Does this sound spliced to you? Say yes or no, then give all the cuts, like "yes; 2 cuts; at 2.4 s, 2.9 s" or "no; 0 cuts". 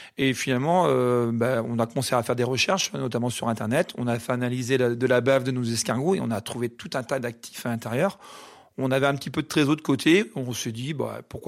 no; 0 cuts